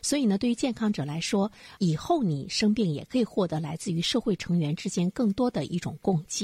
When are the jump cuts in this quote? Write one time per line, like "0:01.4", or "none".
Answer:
none